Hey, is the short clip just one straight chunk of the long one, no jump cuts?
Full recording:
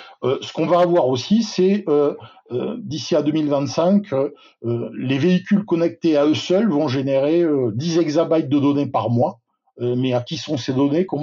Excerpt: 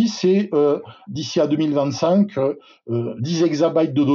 no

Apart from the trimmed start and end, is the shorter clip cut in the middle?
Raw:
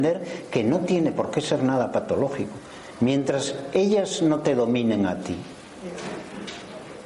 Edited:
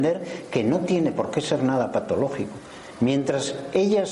no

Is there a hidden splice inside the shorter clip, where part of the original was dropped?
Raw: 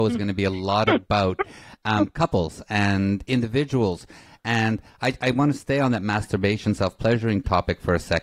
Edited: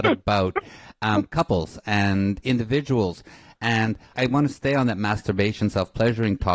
yes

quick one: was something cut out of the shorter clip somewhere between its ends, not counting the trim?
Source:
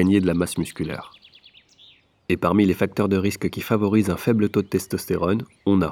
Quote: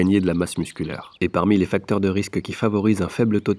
yes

